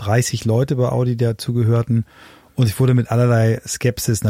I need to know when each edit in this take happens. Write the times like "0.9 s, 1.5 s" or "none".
none